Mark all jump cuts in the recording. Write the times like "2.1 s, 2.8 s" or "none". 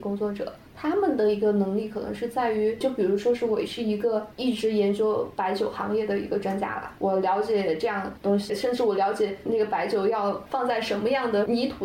none